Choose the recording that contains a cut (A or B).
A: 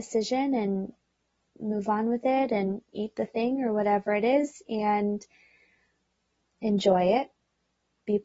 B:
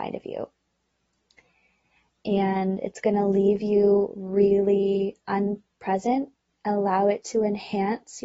B